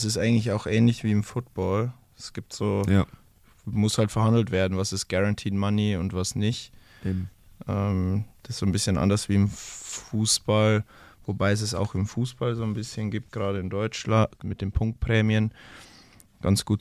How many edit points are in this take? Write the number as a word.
one